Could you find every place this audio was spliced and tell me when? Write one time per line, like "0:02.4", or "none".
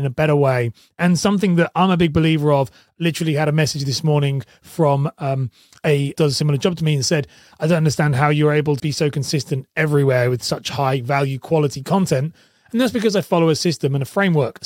0:06.2
0:08.8